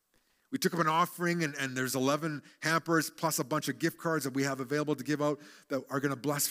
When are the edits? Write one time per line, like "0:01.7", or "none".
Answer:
none